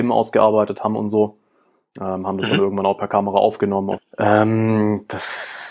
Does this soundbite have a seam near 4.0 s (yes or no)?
yes